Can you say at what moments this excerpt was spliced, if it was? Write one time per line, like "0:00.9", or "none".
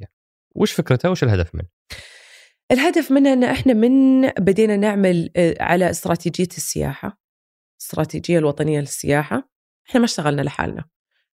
none